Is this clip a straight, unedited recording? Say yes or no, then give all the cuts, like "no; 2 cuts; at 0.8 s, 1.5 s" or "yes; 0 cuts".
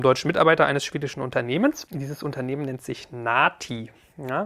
yes; 0 cuts